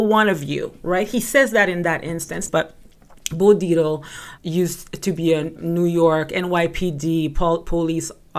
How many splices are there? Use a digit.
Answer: 3